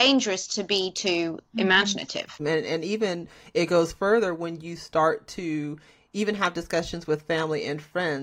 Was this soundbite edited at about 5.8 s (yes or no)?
no